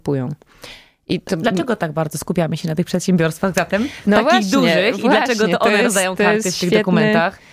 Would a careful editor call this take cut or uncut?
uncut